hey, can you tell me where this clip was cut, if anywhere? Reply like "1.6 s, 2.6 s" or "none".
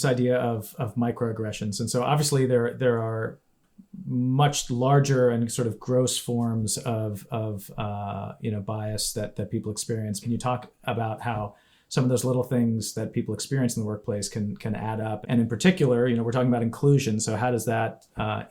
10.2 s, 15.2 s